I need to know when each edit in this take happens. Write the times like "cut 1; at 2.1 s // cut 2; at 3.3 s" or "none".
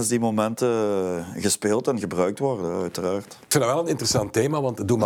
none